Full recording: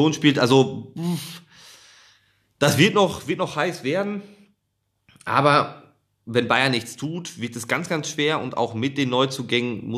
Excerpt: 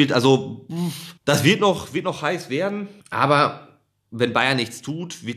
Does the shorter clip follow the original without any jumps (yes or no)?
no